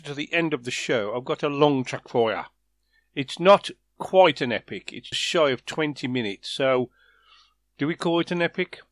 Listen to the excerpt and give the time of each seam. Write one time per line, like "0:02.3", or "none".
0:05.1